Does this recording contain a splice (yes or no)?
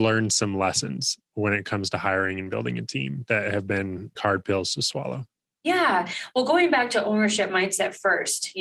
yes